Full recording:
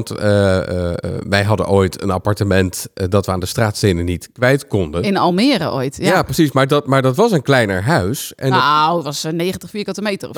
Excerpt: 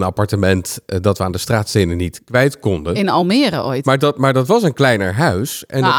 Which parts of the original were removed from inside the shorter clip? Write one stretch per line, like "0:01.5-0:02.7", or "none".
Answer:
0:05.9-0:06.5